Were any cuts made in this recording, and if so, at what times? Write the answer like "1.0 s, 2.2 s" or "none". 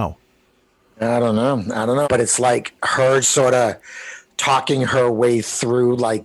2.0 s, 3.2 s